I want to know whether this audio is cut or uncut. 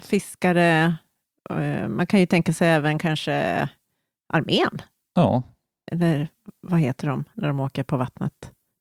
uncut